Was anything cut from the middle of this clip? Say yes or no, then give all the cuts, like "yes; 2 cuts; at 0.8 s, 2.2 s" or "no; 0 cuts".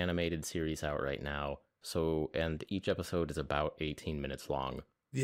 yes; 1 cut; at 1.8 s